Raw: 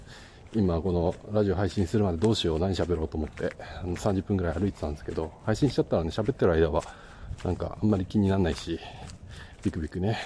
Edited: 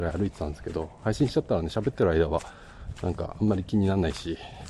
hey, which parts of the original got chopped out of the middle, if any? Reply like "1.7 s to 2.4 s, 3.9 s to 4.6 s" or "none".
none

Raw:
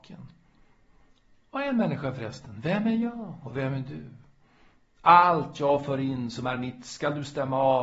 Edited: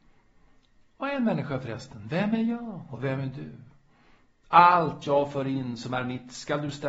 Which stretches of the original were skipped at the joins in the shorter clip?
none

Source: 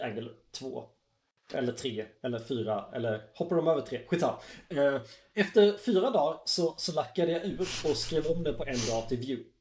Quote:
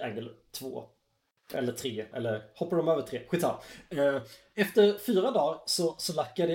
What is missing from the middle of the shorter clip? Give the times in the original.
2.1 s to 2.9 s

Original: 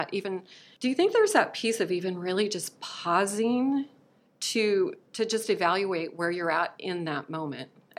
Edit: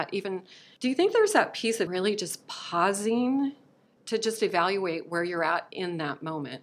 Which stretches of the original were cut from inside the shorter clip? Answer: 1.9 s to 2.2 s, 4.3 s to 5.0 s

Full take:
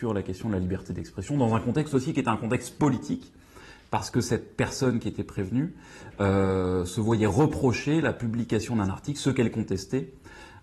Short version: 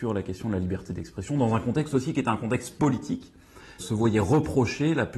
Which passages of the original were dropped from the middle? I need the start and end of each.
3.8 s to 6.9 s

